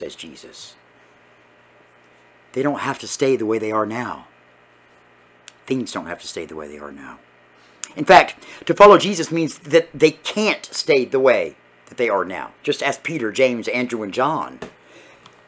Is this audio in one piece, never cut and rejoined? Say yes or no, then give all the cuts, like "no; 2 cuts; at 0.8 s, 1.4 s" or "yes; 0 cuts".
no; 1 cut; at 12.6 s